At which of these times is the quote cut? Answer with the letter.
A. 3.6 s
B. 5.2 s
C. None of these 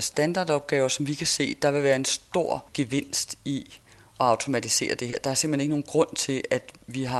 C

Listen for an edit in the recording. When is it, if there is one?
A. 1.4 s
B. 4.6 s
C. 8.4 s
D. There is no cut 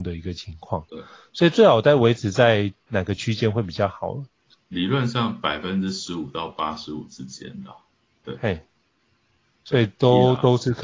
B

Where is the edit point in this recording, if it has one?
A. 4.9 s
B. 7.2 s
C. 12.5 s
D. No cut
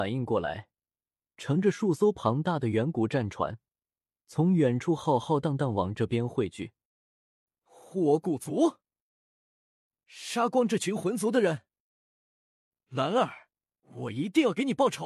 D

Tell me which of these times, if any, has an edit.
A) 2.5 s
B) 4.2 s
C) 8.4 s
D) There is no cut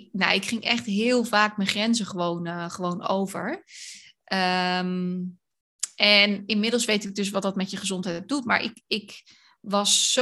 D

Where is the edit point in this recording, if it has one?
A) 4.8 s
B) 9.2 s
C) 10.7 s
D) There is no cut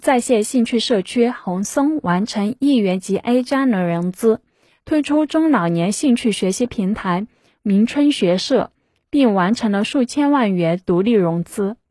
A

